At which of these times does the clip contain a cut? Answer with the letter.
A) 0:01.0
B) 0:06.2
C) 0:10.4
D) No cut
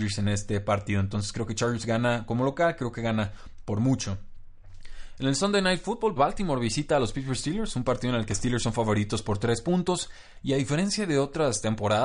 B